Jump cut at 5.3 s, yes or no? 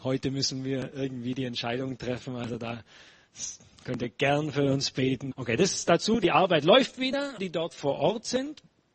yes